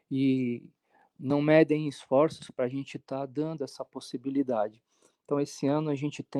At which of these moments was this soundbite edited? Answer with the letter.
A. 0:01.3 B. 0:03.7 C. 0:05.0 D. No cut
D